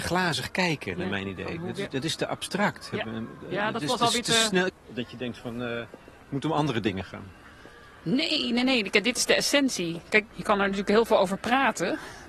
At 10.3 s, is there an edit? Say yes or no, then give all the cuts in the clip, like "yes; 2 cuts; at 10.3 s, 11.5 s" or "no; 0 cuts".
yes; 2 cuts; at 4.7 s, 10.3 s